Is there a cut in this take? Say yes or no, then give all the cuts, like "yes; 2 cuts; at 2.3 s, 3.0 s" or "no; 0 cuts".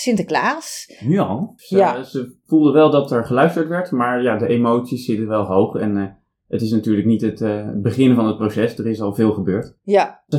yes; 1 cut; at 1.6 s